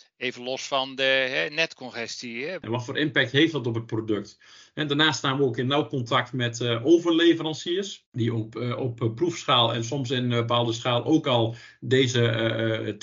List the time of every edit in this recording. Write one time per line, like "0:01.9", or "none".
0:02.6